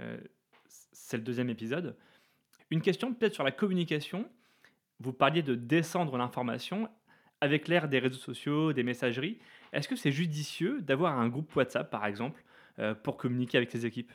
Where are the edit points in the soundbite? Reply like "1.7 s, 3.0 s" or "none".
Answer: 2.6 s